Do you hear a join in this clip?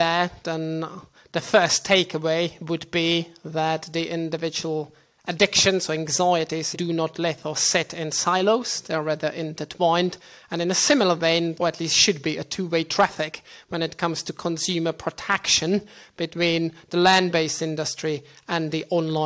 yes; 2 cuts; at 6.7 s, 11.5 s

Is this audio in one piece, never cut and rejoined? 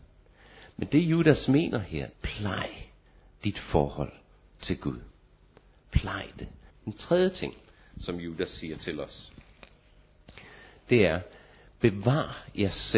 no; 2 cuts; at 2.1 s, 6.7 s

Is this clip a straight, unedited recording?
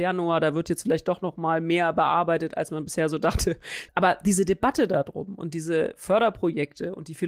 no; 1 cut; at 3.9 s

